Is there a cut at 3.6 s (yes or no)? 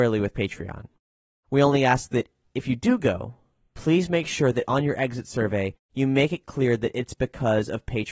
no